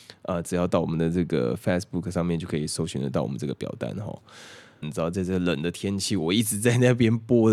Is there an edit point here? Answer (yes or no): yes